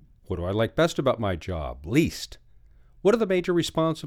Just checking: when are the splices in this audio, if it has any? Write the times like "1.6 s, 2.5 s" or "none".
none